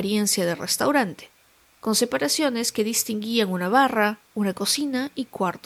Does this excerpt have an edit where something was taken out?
no; 0 cuts

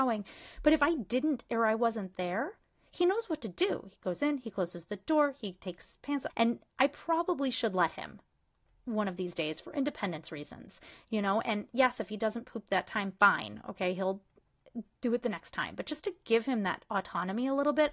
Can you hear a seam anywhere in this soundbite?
yes; 1 cut; at 6.3 s

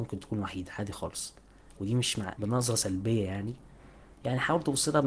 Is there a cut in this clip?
yes; 1 cut; at 2.4 s

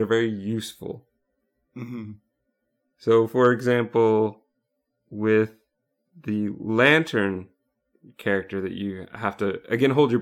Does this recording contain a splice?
no; 0 cuts

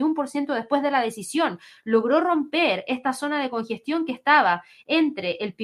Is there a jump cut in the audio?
no; 0 cuts

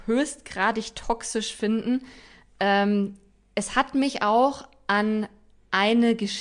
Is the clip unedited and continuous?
yes; 0 cuts

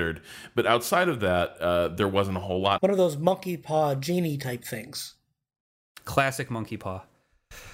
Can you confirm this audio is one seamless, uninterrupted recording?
no; 1 cut; at 2.8 s

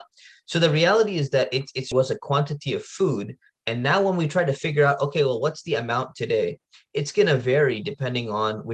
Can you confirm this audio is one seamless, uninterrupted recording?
no; 1 cut; at 1.9 s

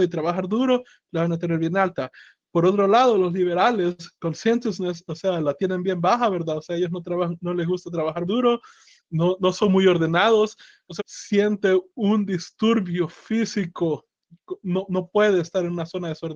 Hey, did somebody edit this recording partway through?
yes; 2 cuts; at 8.2 s, 11.0 s

